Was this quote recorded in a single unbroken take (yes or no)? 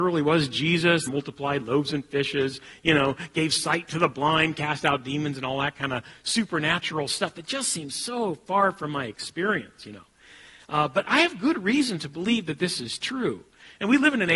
no